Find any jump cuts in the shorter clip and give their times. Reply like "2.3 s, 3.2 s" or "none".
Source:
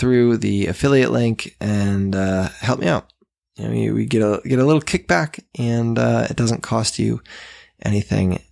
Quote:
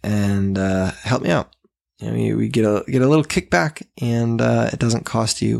none